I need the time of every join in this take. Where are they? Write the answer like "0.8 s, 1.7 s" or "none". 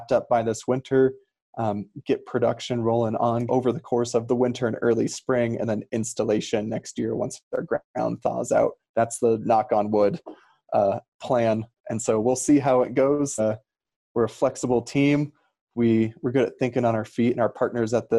3.5 s, 13.4 s